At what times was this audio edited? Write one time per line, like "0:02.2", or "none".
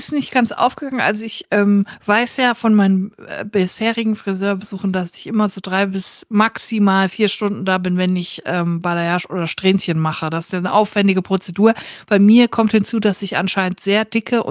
none